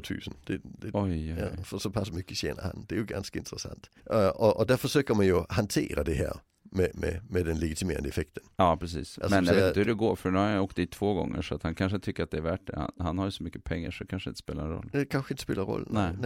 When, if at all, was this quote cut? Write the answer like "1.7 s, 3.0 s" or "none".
4.0 s